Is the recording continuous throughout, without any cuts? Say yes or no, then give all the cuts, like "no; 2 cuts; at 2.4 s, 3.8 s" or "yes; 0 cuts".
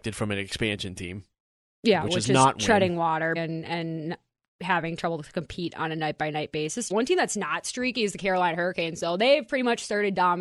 no; 2 cuts; at 3.4 s, 6.9 s